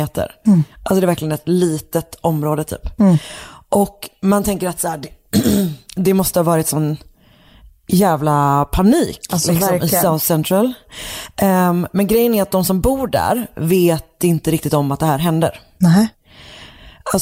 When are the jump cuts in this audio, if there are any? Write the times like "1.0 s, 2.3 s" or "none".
none